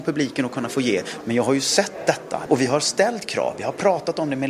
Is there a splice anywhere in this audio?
yes; 2 cuts; at 1.2 s, 2.5 s

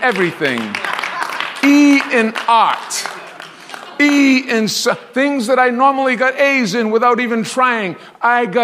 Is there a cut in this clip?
no; 0 cuts

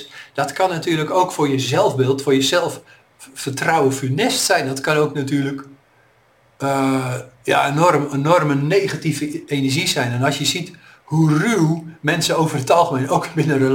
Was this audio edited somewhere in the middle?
no; 0 cuts

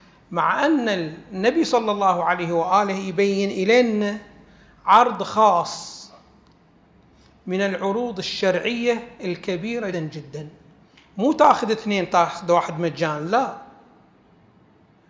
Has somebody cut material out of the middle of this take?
yes; 1 cut; at 9.9 s

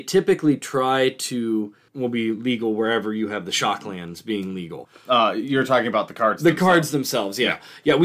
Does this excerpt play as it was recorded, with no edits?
no; 1 cut; at 1.9 s

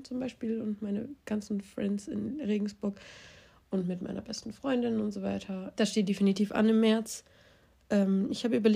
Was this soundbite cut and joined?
yes; 1 cut; at 5.7 s

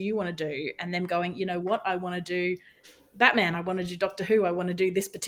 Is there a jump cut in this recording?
no; 0 cuts

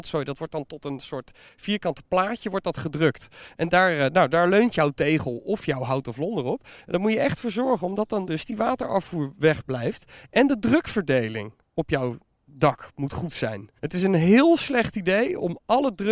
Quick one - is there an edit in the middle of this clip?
yes; 1 cut; at 13.8 s

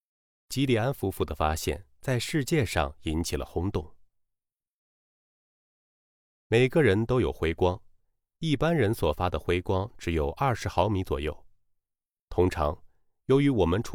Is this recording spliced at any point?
no; 0 cuts

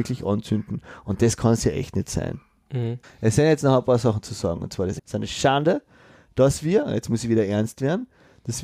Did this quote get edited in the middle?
yes; 2 cuts; at 3.0 s, 5.0 s

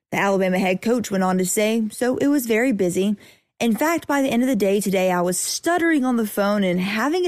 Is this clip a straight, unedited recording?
yes; 0 cuts

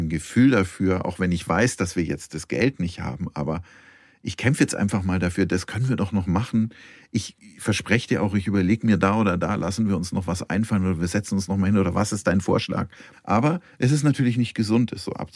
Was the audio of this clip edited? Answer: yes; 1 cut; at 13.1 s

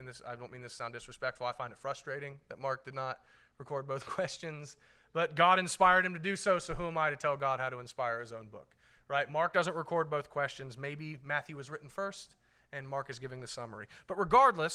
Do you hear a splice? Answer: no; 0 cuts

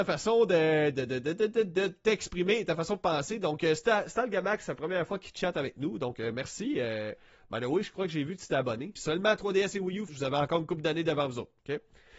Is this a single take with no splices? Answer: no; 2 cuts; at 9.0 s, 10.1 s

